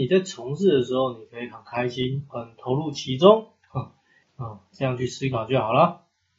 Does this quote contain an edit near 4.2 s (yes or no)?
yes